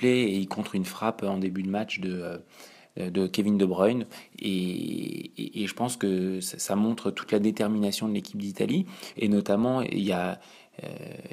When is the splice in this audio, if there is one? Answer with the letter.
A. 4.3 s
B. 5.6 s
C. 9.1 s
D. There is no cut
C